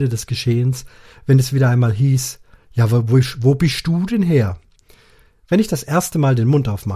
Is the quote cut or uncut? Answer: uncut